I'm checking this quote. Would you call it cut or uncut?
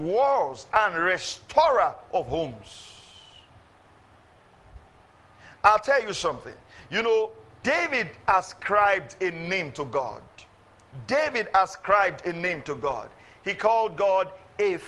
cut